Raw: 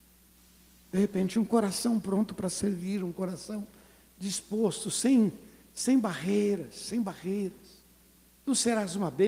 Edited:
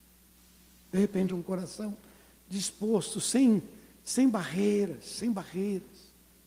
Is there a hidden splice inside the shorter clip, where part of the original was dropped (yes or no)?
yes